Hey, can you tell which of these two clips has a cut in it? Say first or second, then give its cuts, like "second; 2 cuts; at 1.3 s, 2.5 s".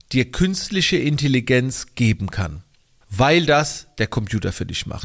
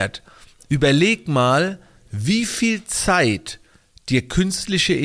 first; 1 cut; at 3.0 s